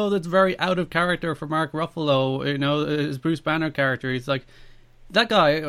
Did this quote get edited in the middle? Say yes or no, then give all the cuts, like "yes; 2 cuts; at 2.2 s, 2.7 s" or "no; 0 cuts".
no; 0 cuts